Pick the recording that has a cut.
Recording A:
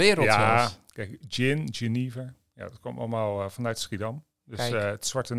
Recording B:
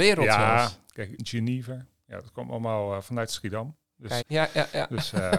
B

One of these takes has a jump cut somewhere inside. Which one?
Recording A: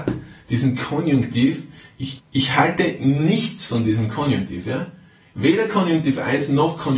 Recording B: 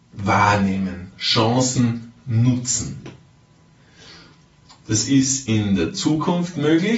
A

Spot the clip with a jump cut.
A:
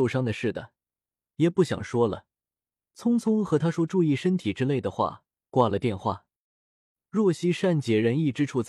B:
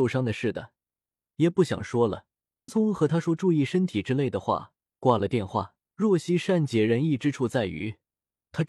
B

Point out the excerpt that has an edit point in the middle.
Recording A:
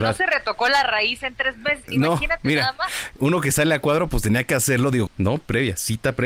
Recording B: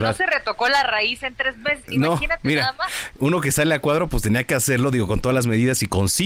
A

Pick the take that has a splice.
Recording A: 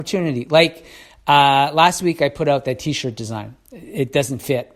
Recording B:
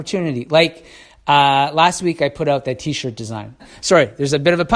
B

